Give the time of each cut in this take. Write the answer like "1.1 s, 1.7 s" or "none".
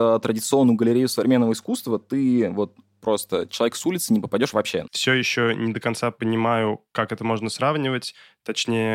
4.9 s